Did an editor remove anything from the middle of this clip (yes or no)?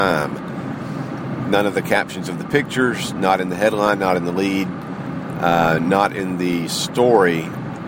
no